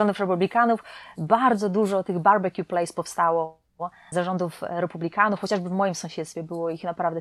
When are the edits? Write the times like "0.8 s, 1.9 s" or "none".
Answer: none